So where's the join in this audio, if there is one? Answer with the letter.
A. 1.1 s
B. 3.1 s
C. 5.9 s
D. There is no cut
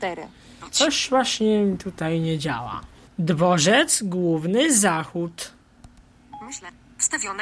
B